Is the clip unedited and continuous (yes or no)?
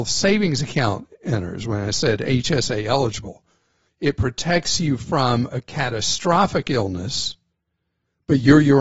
no